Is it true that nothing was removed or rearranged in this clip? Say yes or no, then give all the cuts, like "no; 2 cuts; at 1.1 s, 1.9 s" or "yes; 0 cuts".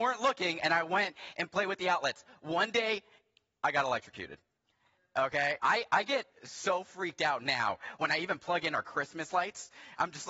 no; 1 cut; at 5.6 s